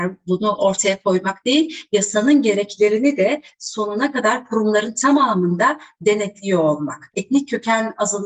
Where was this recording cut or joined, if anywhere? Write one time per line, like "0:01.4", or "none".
0:07.1